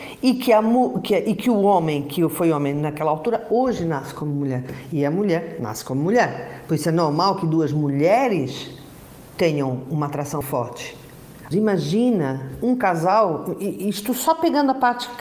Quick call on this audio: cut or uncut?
cut